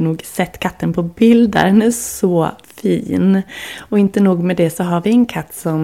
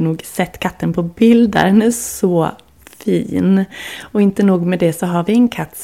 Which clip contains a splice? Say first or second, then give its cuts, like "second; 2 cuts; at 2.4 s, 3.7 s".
first; 1 cut; at 2.6 s